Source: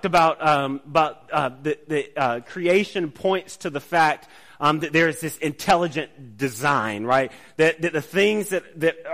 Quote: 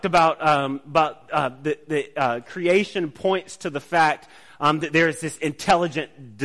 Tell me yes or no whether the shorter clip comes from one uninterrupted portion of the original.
yes